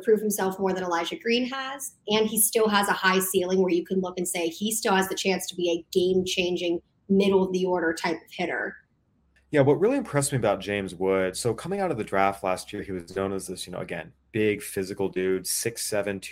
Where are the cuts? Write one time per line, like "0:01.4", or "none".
0:09.4